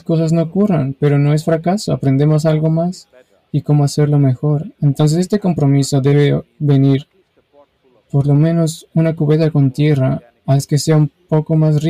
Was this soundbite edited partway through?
no; 0 cuts

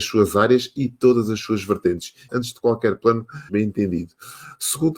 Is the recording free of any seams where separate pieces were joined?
no; 2 cuts; at 2.3 s, 3.5 s

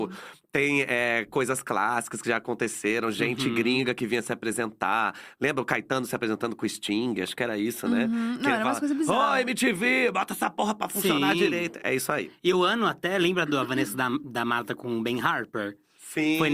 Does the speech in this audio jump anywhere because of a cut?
no; 0 cuts

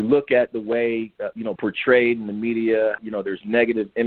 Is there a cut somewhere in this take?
yes; 2 cuts; at 1.6 s, 3.0 s

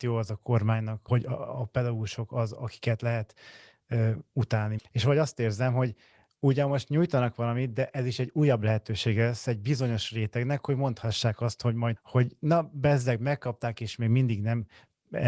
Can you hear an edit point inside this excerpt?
yes; 3 cuts; at 1.1 s, 4.8 s, 12.0 s

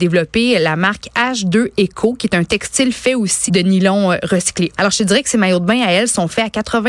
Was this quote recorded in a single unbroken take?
no; 2 cuts; at 3.5 s, 4.8 s

